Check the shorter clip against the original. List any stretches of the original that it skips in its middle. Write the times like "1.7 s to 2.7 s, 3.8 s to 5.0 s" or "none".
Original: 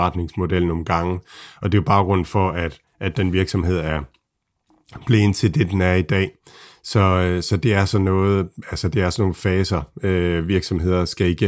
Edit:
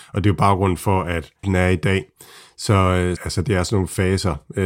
2.9 s to 5.7 s, 7.4 s to 8.6 s